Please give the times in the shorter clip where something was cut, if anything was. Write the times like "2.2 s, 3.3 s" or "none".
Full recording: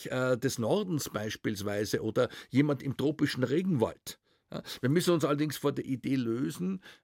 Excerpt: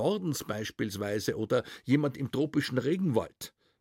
none